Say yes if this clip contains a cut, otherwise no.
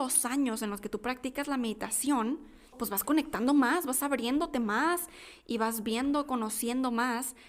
yes